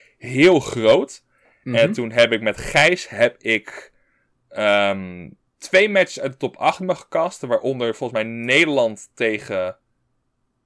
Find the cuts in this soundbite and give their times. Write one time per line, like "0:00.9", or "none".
none